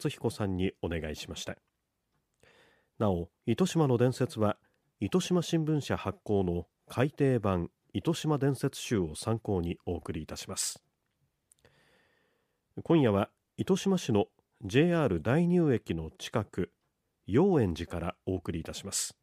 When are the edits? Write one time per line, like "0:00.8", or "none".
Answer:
0:03.4